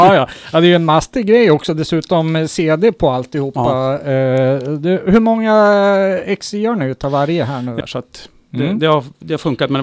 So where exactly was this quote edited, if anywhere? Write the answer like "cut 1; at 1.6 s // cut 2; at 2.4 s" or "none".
cut 1; at 7.8 s